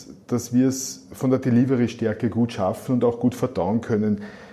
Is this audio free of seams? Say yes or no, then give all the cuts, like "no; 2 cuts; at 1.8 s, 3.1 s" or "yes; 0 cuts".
yes; 0 cuts